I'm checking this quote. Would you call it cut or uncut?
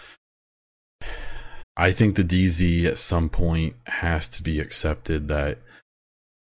cut